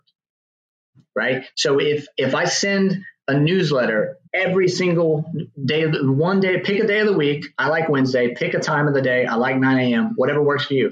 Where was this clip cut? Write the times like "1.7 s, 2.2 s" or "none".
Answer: 4.3 s